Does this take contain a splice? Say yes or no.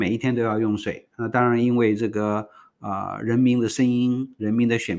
no